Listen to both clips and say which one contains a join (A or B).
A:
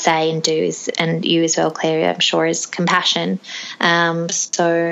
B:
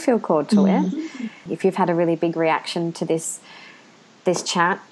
B